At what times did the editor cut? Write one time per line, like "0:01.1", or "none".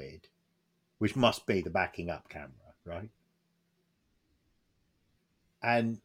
none